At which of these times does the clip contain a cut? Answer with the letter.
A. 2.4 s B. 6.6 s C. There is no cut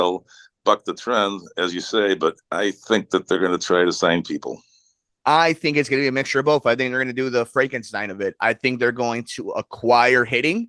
A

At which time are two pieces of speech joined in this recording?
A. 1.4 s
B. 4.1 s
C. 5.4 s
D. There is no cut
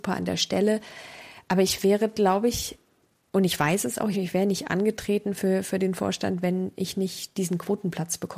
B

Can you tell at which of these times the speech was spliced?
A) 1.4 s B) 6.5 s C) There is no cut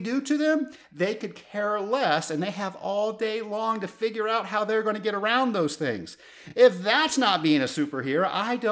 C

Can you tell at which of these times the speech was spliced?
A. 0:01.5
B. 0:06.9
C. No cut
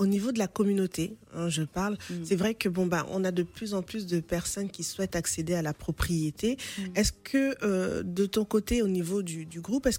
C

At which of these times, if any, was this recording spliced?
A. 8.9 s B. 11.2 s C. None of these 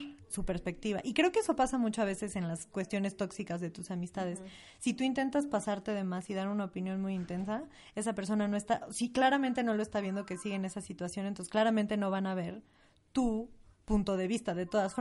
C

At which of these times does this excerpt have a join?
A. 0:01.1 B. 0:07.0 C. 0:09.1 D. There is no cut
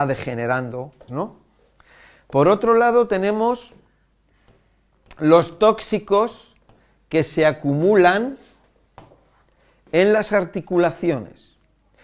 A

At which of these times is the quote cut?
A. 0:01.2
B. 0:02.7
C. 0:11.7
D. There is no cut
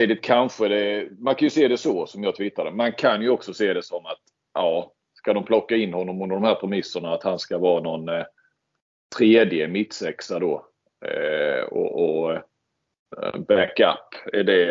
D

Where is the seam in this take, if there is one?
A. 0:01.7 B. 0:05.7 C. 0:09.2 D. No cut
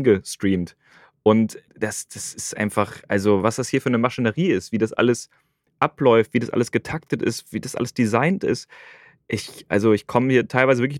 A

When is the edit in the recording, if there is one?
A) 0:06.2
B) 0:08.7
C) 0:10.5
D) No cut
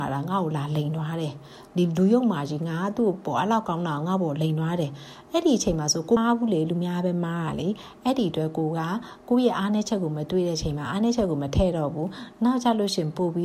A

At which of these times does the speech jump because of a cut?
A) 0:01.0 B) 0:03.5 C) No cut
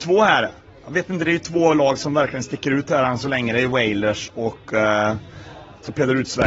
C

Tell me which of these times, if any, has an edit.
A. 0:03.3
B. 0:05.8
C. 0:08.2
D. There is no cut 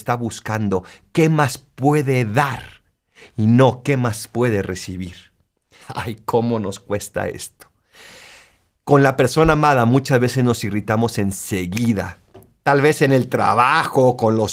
B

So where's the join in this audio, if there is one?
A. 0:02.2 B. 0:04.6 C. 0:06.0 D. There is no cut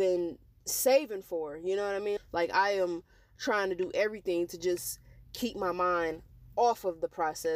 A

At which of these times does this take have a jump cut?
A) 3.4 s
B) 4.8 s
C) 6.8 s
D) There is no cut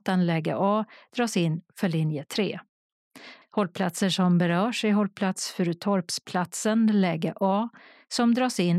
A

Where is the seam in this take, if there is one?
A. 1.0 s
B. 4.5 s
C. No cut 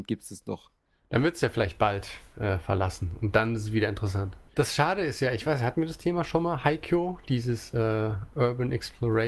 B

